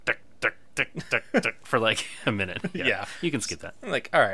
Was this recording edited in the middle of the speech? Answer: no; 0 cuts

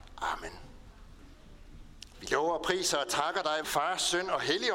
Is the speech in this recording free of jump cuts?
no; 2 cuts; at 2.1 s, 3.6 s

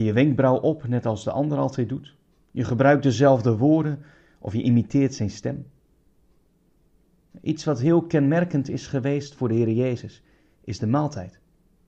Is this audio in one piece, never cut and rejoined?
yes; 0 cuts

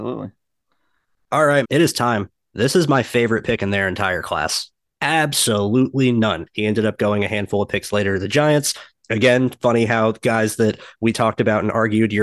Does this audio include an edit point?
yes; 3 cuts; at 1.6 s, 4.8 s, 6.5 s

